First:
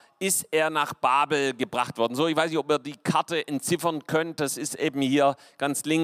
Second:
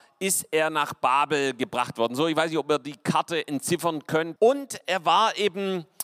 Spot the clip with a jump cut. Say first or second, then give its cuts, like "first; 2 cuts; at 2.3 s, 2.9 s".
second; 1 cut; at 4.4 s